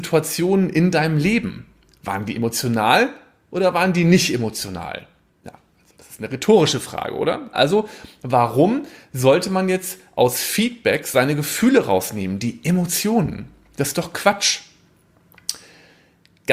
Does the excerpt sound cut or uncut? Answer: cut